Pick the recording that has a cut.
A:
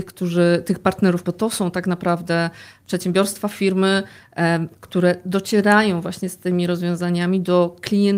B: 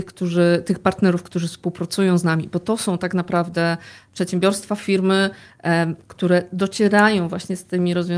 A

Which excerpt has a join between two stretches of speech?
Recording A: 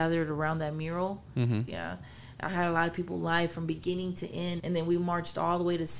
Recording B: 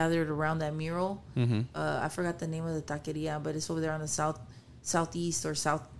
A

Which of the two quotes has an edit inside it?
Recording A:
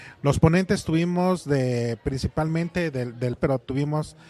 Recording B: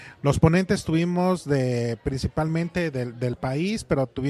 A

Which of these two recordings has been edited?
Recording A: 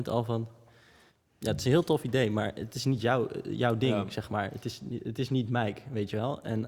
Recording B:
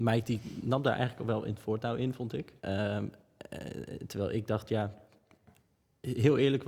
B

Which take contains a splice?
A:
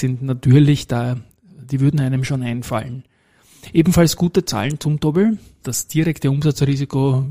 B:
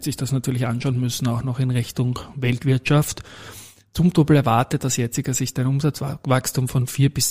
A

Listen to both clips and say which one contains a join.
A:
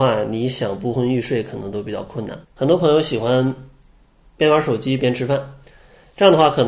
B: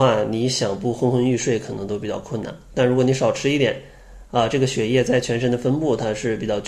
A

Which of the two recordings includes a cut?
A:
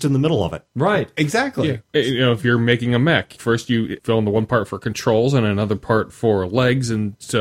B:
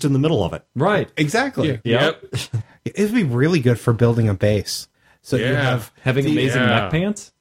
B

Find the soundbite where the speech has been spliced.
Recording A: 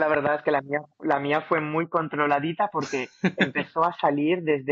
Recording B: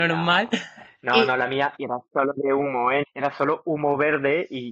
B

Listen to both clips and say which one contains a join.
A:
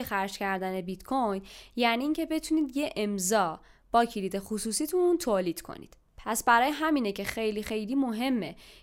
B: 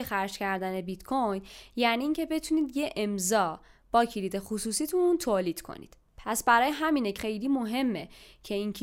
B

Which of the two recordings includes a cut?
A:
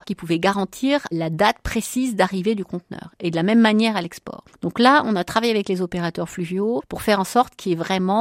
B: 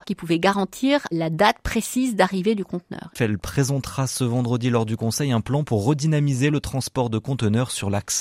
B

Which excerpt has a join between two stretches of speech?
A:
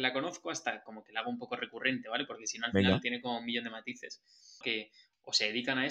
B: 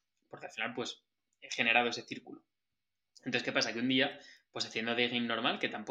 A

